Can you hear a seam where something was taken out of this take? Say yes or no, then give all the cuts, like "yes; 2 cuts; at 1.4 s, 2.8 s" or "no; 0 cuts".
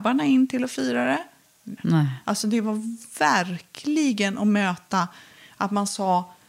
yes; 1 cut; at 1.8 s